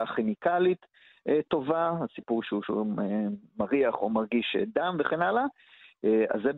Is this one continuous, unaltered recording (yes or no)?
yes